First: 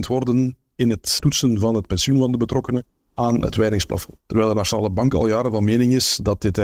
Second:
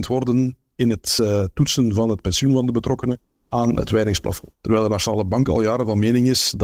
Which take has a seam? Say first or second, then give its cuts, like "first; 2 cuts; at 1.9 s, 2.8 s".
first; 1 cut; at 1.2 s